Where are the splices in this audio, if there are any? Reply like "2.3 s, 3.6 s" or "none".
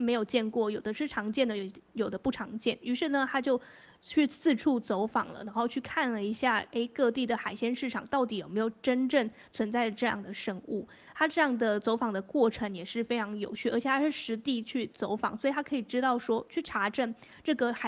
none